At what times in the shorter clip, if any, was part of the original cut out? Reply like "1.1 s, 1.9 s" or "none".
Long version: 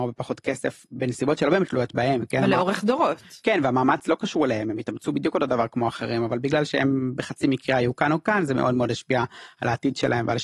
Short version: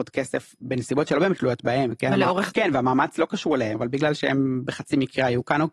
2.5 s, 3.7 s